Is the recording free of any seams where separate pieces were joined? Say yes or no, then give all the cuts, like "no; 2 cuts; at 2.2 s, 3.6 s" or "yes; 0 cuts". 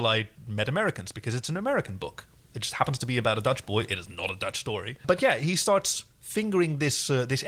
yes; 0 cuts